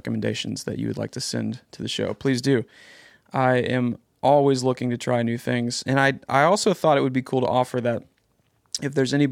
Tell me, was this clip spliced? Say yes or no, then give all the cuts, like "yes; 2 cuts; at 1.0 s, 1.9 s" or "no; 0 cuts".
no; 0 cuts